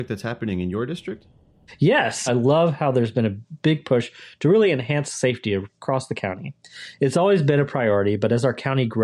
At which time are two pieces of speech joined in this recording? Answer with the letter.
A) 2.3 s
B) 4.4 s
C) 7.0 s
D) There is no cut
A